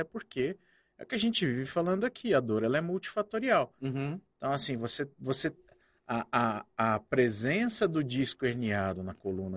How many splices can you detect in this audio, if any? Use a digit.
0